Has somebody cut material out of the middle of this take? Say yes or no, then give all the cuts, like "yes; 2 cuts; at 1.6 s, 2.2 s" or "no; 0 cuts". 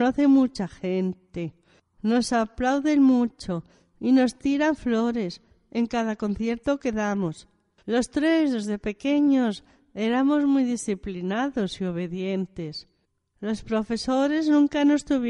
yes; 2 cuts; at 1.9 s, 7.8 s